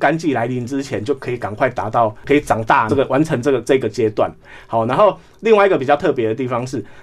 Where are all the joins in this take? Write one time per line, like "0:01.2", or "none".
0:02.9